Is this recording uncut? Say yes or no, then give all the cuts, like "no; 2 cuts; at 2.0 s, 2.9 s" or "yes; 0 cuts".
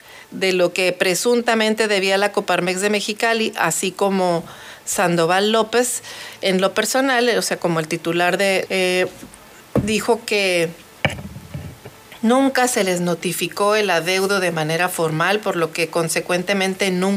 no; 1 cut; at 8.7 s